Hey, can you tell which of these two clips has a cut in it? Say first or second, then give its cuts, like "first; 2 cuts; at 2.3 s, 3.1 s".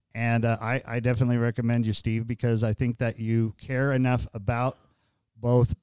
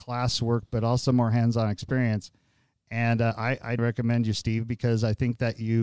second; 1 cut; at 3.8 s